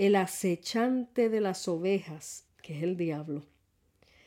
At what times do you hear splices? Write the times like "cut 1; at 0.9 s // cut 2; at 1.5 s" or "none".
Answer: cut 1; at 2.5 s